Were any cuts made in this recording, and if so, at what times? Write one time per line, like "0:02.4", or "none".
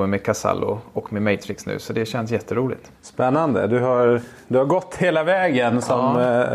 0:03.0